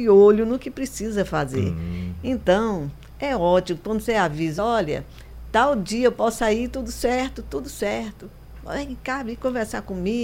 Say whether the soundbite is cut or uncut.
uncut